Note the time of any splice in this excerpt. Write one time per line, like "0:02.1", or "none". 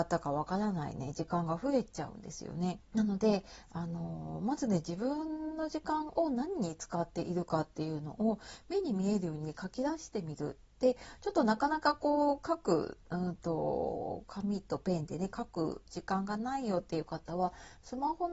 0:02.8
0:13.0